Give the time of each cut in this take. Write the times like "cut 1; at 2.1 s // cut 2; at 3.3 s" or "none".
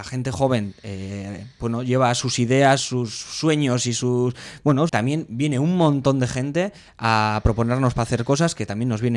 cut 1; at 4.9 s